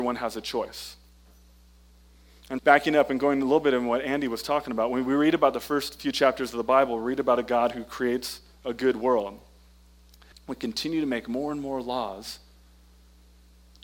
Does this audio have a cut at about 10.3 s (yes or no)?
yes